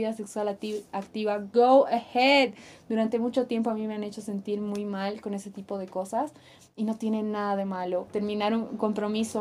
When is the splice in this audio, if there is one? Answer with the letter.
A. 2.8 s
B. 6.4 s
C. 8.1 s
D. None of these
C